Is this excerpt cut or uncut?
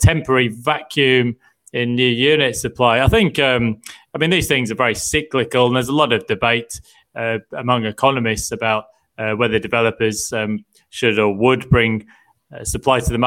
uncut